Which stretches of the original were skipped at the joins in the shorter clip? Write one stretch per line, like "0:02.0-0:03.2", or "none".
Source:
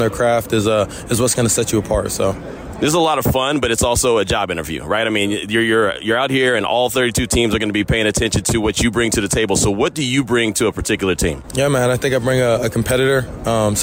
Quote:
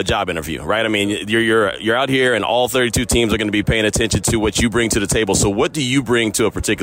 none